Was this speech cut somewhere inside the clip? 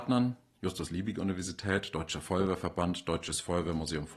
no; 0 cuts

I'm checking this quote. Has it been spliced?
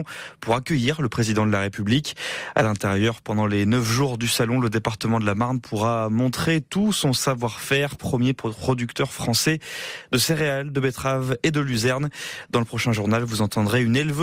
no; 0 cuts

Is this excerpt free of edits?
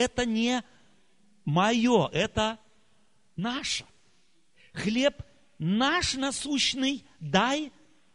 yes; 0 cuts

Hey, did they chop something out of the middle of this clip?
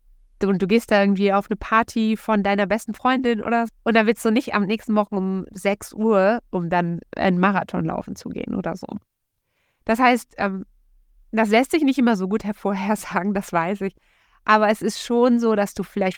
yes; 2 cuts; at 3.7 s, 6.5 s

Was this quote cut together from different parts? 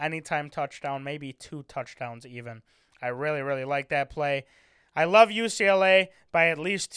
no; 0 cuts

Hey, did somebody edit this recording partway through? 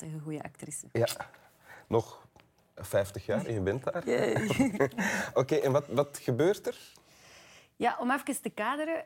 no; 0 cuts

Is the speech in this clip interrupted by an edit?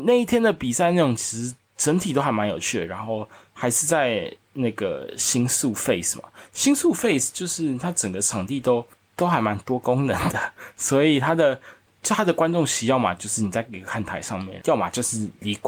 yes; 1 cut; at 14.6 s

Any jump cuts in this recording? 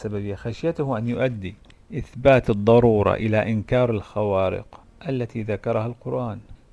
no; 0 cuts

